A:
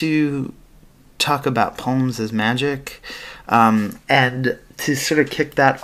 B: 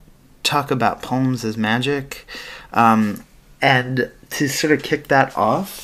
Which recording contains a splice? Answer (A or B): A